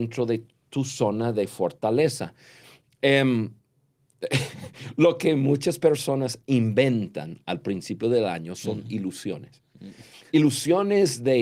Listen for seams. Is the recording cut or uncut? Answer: uncut